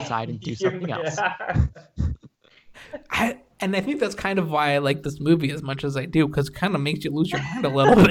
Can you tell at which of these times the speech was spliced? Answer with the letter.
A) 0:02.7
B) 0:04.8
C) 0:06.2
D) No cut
A